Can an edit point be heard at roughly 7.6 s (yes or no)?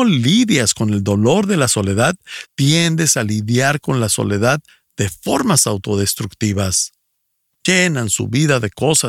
yes